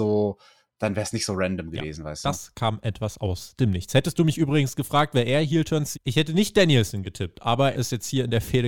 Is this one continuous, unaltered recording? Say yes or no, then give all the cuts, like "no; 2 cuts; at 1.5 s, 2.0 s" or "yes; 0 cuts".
no; 2 cuts; at 5.9 s, 7.7 s